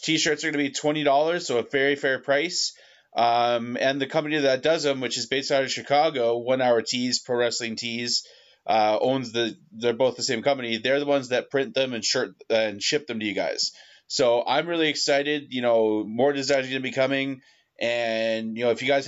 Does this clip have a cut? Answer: no; 0 cuts

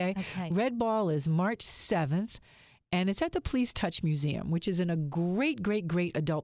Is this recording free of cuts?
yes; 0 cuts

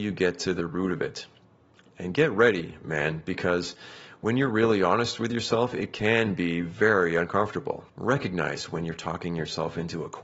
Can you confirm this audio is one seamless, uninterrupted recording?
no; 1 cut; at 7.9 s

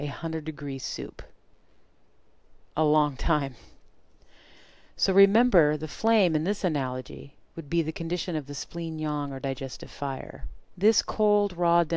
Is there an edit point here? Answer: no; 0 cuts

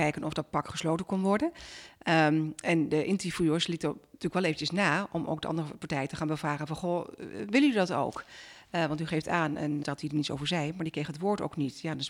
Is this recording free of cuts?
no; 1 cut; at 9.8 s

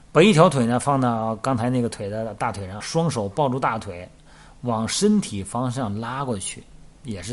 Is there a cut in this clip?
yes; 1 cut; at 2.8 s

